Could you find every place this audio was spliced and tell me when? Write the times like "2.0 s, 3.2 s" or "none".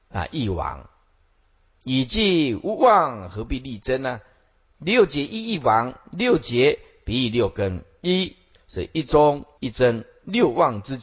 4.7 s, 9.6 s